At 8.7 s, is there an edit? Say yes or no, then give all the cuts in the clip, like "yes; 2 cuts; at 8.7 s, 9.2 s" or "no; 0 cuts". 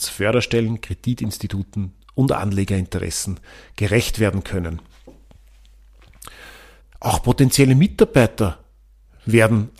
no; 1 cut; at 6.8 s